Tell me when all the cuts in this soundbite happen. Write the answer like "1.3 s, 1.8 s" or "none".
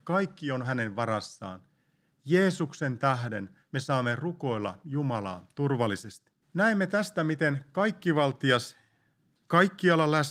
6.4 s